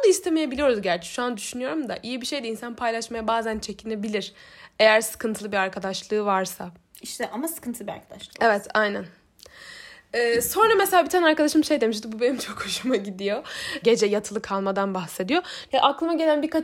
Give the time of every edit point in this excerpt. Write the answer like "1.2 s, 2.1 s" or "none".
13.8 s, 15.7 s